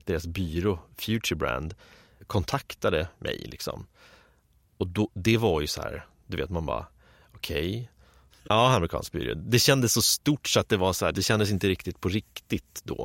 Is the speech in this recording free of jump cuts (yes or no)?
no